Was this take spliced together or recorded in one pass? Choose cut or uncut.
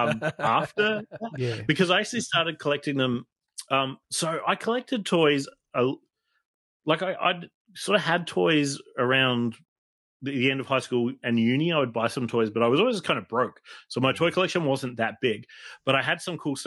uncut